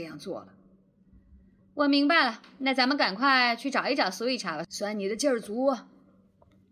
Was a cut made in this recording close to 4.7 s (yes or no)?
yes